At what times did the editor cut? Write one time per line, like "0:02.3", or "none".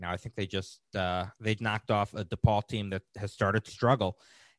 0:01.6
0:03.7